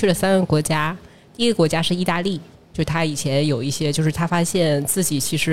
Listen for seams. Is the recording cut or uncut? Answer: uncut